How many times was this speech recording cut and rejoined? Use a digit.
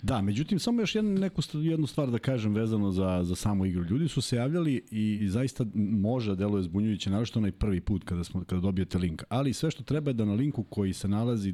0